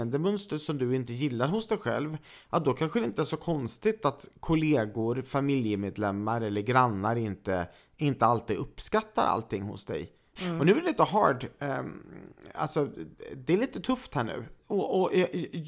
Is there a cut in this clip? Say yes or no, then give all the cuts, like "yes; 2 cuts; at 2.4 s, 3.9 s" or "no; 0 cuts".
yes; 2 cuts; at 10.4 s, 14.6 s